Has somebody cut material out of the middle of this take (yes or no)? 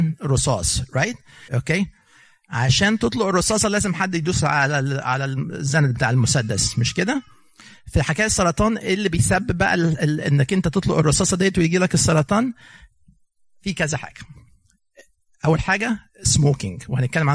yes